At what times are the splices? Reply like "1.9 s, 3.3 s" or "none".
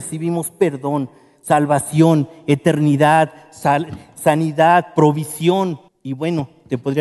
5.9 s